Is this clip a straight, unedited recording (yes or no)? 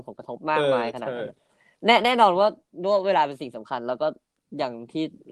yes